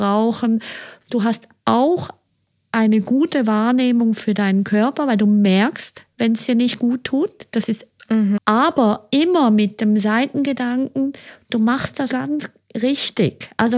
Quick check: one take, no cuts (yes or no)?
no